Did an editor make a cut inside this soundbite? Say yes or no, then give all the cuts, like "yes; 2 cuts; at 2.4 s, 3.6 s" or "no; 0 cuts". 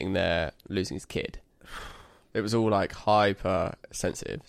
yes; 1 cut; at 2.3 s